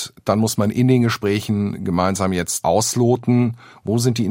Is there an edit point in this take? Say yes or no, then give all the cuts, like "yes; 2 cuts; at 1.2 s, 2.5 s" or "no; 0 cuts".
yes; 1 cut; at 2.6 s